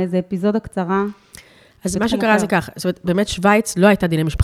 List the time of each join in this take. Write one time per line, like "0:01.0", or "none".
none